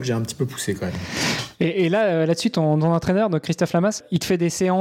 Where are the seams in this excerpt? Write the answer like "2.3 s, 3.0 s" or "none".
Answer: none